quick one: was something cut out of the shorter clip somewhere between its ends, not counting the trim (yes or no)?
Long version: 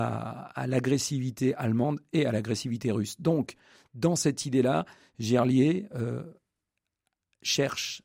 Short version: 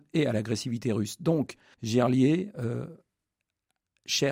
yes